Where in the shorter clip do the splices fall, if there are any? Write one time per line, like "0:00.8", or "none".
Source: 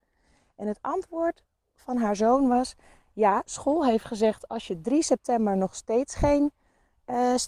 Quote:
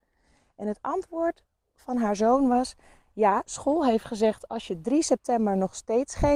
none